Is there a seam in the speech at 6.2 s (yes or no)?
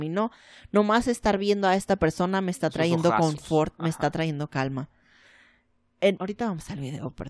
yes